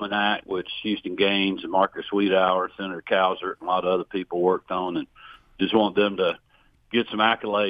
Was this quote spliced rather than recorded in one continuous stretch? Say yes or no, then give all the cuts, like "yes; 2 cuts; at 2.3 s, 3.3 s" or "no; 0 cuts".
no; 0 cuts